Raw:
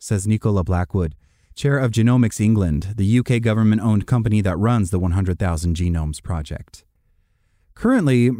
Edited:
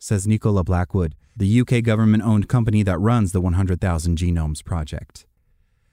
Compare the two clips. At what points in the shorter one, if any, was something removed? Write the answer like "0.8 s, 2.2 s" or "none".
1.4 s